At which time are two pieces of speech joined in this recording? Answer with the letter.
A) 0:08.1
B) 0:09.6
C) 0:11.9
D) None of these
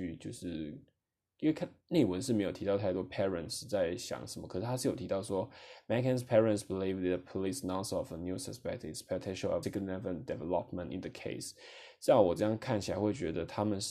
B